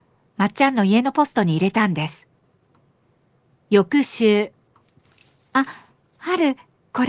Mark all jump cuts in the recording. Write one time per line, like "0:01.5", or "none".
none